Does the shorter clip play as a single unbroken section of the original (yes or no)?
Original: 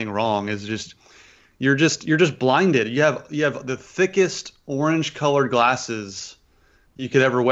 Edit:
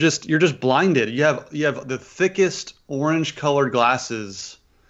yes